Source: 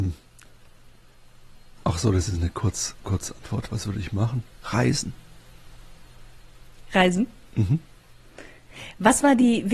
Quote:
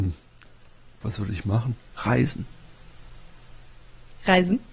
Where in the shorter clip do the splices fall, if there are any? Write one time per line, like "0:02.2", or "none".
0:01.0